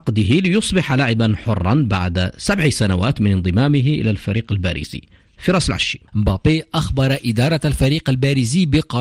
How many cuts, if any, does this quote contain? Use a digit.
1